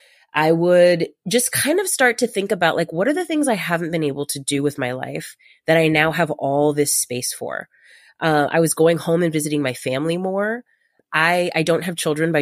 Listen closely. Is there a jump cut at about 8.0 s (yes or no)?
no